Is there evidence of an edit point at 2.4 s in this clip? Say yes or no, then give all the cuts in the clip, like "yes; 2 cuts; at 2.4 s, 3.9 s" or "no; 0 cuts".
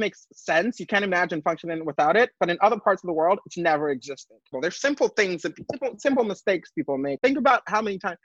no; 2 cuts; at 4.5 s, 7.2 s